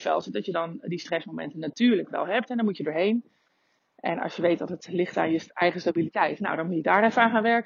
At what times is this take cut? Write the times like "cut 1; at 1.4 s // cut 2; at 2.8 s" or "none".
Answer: none